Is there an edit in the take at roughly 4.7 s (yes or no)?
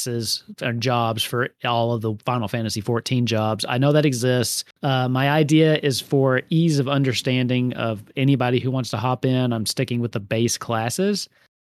yes